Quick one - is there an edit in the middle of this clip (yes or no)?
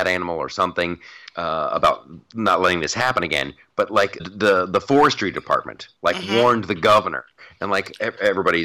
yes